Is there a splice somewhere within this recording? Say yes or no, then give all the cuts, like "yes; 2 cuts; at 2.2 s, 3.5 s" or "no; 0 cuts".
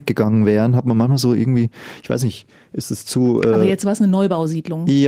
no; 0 cuts